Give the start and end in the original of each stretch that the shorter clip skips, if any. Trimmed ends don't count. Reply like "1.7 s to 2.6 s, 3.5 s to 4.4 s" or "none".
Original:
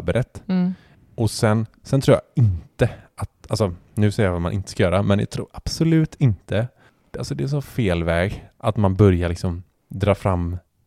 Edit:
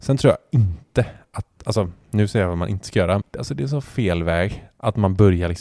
5.0 s to 7.0 s